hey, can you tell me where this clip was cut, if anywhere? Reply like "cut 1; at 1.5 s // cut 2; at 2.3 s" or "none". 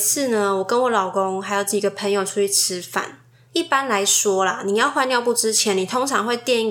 cut 1; at 3.5 s